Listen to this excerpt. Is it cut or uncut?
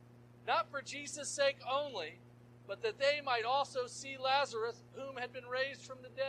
uncut